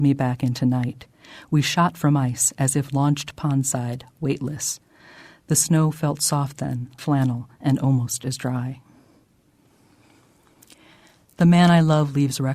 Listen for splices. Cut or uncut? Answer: cut